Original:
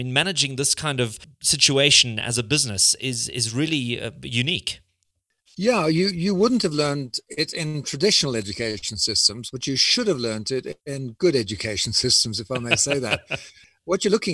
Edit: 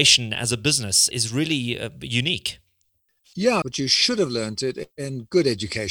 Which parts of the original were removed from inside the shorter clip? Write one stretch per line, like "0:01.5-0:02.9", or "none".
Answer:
0:03.0-0:03.3
0:05.8-0:09.5